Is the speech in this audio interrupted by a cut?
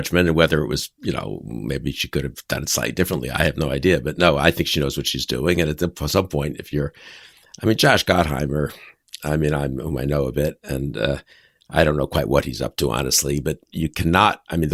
no; 0 cuts

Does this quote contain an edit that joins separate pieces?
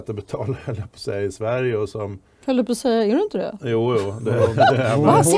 no; 0 cuts

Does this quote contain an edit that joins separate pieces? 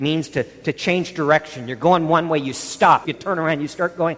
yes; 1 cut; at 3.0 s

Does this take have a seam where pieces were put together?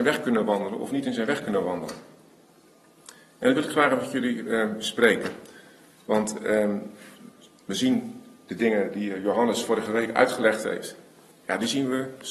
no; 0 cuts

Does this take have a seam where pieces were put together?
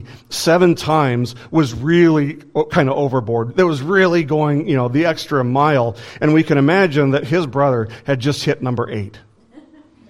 no; 0 cuts

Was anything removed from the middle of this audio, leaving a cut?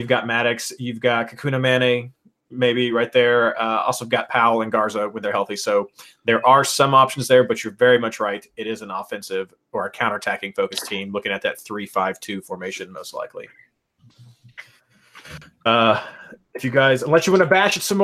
no; 0 cuts

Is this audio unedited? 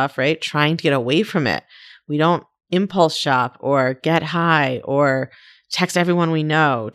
yes; 0 cuts

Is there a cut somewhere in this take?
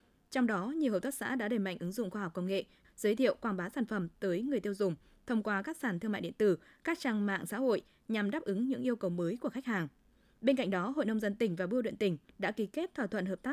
yes; 1 cut; at 2.8 s

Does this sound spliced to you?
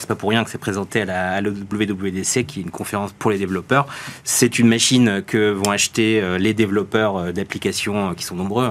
no; 0 cuts

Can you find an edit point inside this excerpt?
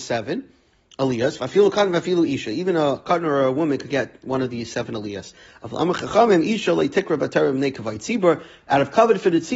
no; 0 cuts

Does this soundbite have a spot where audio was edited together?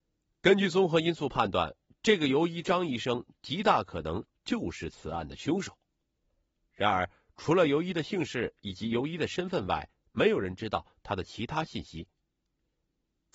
no; 0 cuts

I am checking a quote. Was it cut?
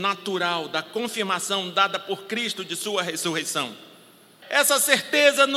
yes; 1 cut; at 4.4 s

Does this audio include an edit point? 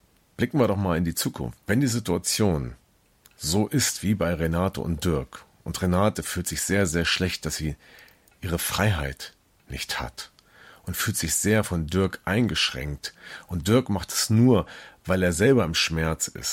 yes; 1 cut; at 1.6 s

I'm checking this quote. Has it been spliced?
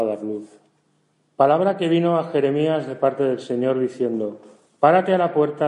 yes; 1 cut; at 1.1 s

